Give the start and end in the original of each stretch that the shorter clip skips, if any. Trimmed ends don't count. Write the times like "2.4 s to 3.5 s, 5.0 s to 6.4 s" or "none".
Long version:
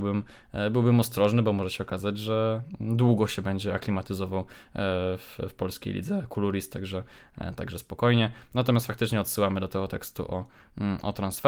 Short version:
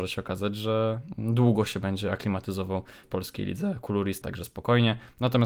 4.7 s to 5.5 s, 6.7 s to 7.6 s

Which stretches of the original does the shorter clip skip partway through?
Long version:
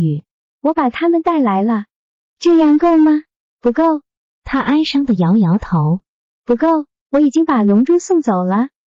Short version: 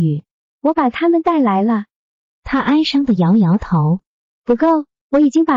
2.3 s to 4.3 s

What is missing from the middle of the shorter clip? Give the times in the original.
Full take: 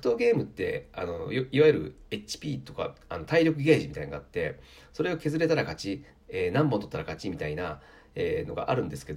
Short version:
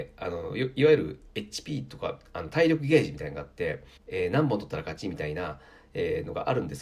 4.7 s to 6.2 s

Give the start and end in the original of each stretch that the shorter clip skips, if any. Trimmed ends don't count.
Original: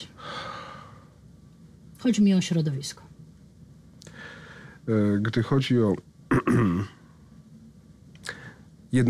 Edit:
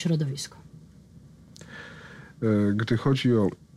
none

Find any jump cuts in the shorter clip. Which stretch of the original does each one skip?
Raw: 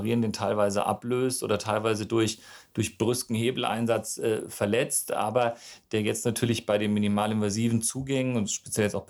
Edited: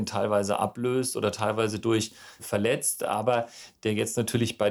2.7 s to 4.5 s

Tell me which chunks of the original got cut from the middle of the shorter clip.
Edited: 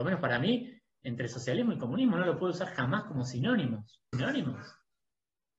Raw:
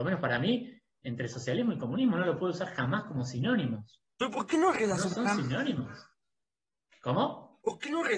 4.1 s to 5.4 s

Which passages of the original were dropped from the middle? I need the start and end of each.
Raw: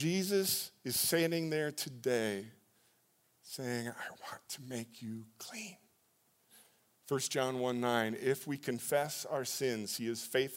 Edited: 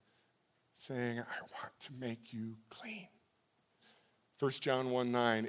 none

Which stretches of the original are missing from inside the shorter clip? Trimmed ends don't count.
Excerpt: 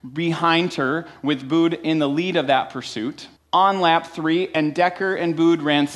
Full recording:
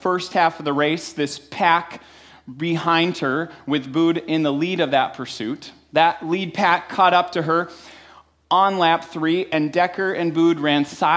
5.8 s to 8.3 s

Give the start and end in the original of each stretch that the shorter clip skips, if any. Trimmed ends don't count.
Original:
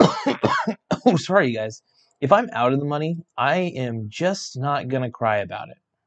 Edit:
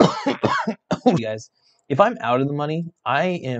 1.2 s to 1.5 s

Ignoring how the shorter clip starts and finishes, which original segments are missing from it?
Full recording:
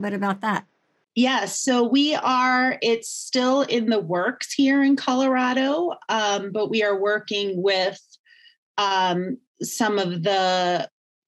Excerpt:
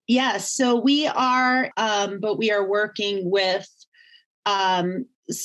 2.8 s to 6.0 s

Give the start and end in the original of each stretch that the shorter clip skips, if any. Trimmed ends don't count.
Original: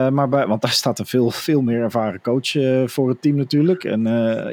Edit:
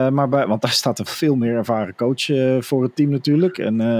1.1 s to 1.3 s

